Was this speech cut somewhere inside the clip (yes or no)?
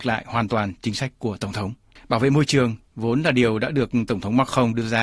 yes